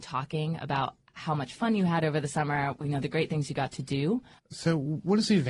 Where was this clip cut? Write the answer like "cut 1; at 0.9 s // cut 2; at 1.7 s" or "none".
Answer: cut 1; at 4.4 s